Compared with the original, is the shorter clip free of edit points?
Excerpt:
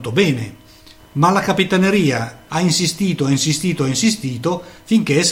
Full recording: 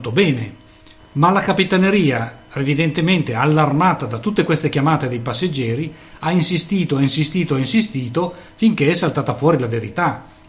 no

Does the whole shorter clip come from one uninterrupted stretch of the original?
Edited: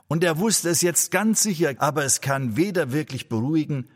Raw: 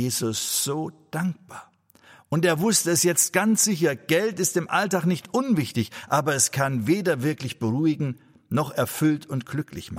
no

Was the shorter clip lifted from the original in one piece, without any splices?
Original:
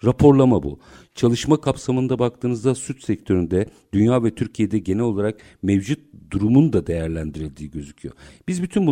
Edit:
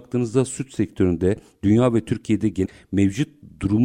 no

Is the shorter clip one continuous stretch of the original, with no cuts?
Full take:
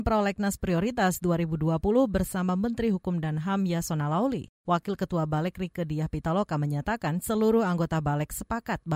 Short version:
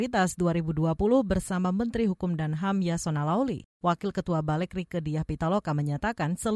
yes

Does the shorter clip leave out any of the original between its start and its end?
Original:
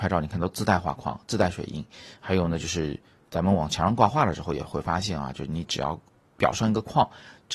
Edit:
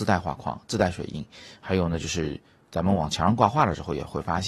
no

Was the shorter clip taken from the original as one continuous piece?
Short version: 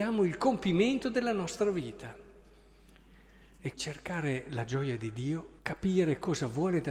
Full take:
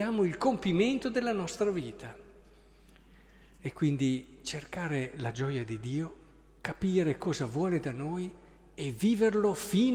no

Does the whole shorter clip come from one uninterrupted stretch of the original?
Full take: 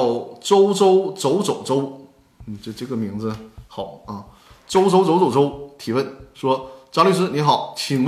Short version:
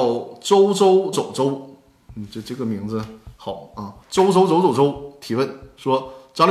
no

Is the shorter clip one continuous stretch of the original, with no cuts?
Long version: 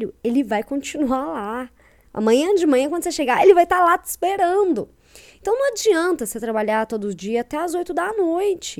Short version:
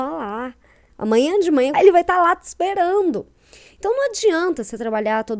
no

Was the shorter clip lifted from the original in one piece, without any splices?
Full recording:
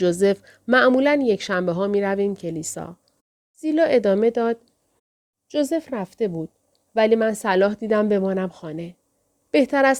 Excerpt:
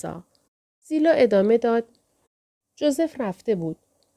yes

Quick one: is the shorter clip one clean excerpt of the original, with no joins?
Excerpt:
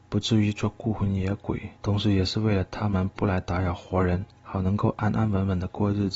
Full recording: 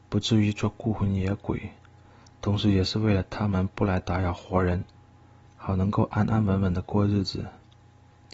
no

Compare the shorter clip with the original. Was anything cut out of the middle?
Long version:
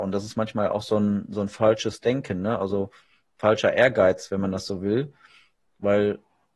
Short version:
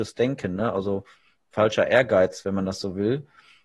no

